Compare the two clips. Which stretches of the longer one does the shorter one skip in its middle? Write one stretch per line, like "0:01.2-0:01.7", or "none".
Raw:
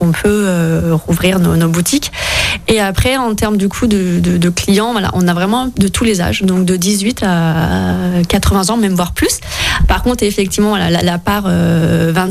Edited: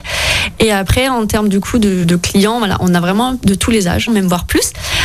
0:04.1-0:04.4
0:06.4-0:08.7